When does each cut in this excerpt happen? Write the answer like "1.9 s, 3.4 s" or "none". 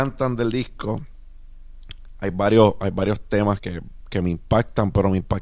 3.6 s